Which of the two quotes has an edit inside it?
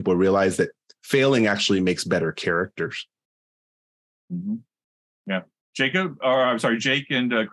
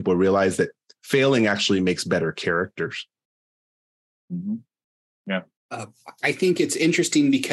second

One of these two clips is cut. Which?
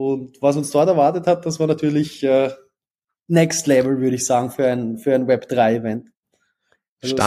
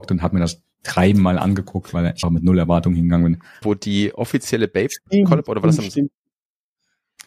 second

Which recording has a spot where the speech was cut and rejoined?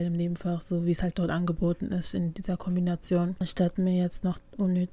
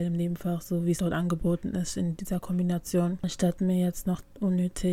second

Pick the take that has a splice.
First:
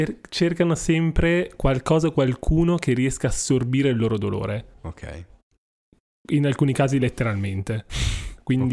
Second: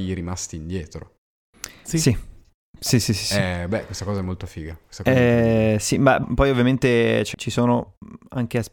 second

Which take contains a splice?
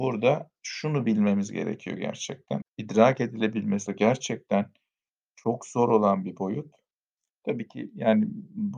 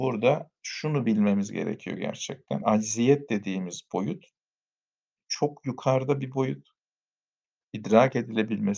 first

